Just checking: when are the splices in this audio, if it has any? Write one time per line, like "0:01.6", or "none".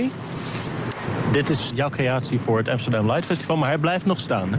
0:01.7